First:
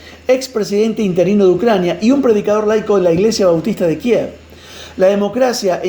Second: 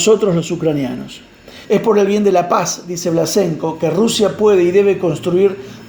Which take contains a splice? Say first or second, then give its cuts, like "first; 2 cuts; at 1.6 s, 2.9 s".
second; 1 cut; at 1.6 s